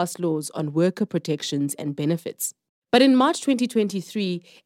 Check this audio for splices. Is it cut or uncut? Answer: cut